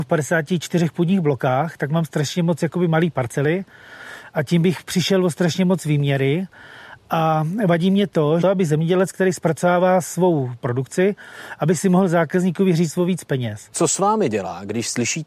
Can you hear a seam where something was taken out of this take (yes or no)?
yes